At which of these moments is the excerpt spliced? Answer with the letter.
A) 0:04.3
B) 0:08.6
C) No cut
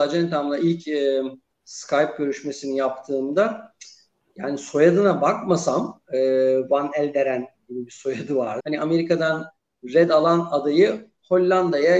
B